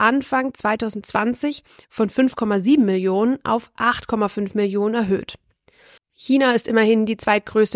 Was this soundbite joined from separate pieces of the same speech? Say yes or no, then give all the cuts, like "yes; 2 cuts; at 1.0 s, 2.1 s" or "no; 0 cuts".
yes; 1 cut; at 6.0 s